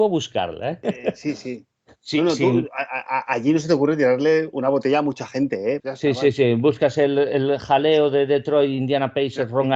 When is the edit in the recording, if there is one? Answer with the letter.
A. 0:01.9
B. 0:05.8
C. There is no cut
B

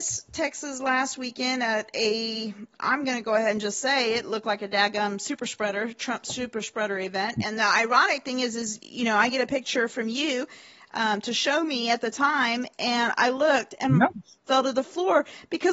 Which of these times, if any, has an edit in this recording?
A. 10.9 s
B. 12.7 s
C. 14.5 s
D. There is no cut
C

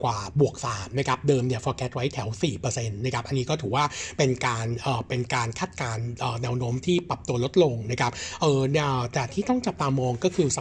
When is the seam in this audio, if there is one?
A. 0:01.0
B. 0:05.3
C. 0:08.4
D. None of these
D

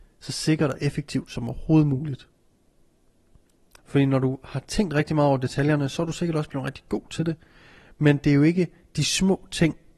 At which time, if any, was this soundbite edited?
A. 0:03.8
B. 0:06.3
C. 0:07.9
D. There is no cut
A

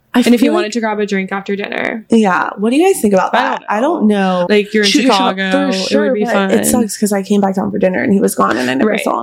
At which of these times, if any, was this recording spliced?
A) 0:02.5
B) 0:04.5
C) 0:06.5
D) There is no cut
B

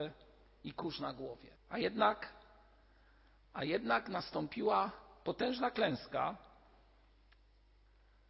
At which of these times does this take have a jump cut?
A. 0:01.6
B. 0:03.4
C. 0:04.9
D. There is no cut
A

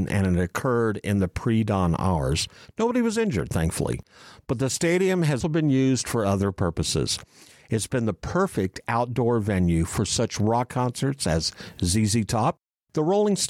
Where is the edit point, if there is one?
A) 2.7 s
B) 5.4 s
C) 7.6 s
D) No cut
B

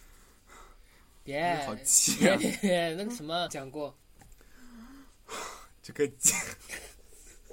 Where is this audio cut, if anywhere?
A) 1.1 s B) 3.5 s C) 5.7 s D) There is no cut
B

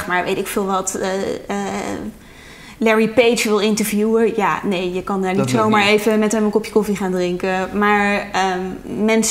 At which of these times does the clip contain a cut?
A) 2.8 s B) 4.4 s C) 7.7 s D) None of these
D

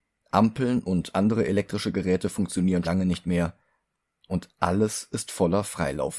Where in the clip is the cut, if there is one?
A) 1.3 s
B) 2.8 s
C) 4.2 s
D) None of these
B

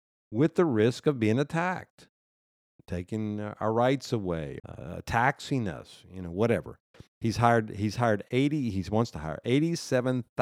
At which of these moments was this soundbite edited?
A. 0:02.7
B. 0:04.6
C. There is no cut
B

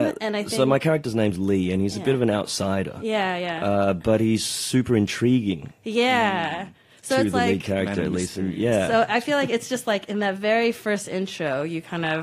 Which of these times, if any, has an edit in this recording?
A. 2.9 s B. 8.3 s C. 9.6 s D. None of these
D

